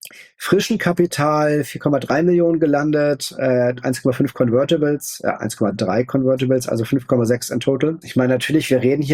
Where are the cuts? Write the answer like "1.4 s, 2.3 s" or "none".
8.0 s